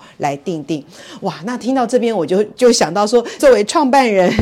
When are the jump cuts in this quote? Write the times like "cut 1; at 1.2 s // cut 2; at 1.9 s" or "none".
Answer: cut 1; at 3.4 s

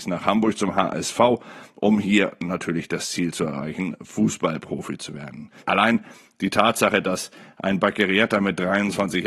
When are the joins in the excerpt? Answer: cut 1; at 5.6 s

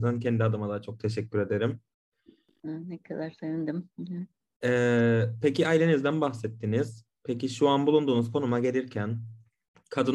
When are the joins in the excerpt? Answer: none

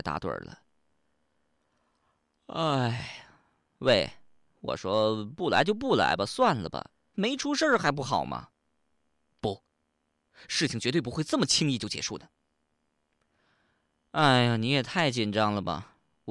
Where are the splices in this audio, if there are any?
none

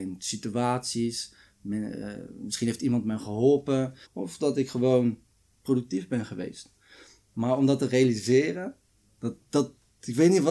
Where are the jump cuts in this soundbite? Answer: cut 1; at 4.0 s

